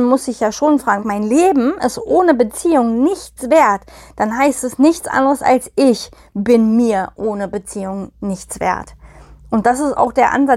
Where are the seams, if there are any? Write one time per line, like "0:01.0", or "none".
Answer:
0:01.0